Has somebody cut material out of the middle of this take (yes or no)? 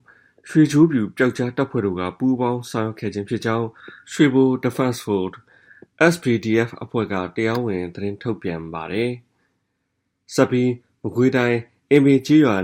no